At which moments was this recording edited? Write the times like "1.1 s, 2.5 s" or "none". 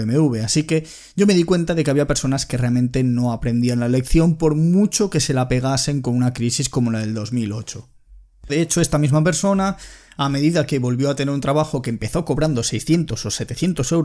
8.5 s